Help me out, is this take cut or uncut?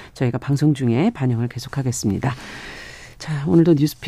uncut